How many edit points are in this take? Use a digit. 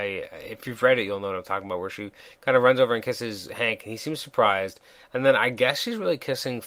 0